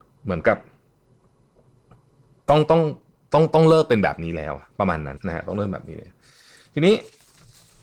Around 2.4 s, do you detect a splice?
no; 1 cut; at 5.2 s

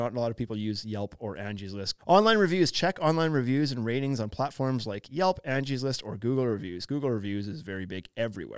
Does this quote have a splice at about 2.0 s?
yes; 2 cuts; at 2.0 s, 6.9 s

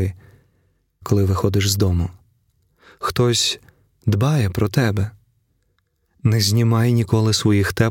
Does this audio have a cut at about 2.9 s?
no; 1 cut; at 1.0 s

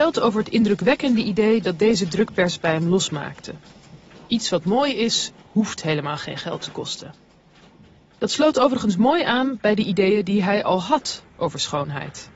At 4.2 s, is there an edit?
no; 0 cuts

